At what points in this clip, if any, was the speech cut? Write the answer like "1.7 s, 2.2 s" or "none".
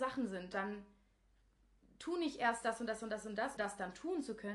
3.6 s